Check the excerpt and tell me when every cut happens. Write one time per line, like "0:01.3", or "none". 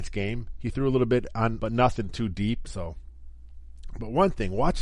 0:01.6
0:02.7